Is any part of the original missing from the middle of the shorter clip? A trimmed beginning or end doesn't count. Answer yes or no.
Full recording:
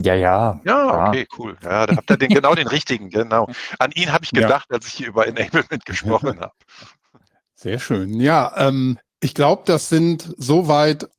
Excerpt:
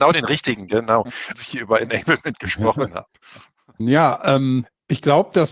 yes